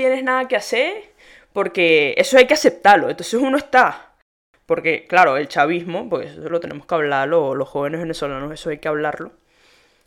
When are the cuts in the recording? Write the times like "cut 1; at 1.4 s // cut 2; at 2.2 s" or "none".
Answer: none